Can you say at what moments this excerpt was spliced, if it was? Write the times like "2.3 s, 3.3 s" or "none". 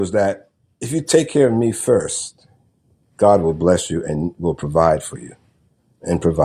3.0 s